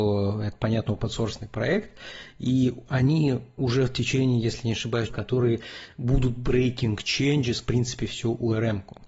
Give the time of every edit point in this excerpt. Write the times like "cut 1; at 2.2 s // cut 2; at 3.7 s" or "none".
cut 1; at 5.1 s // cut 2; at 7.6 s